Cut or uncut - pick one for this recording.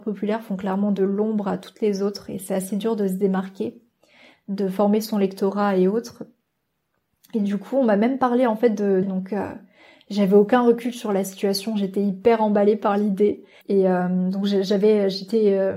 cut